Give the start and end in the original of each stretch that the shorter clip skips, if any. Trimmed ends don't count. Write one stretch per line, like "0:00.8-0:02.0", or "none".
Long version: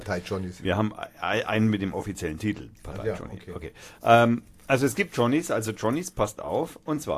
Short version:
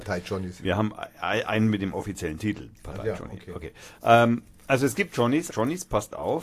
0:05.5-0:05.7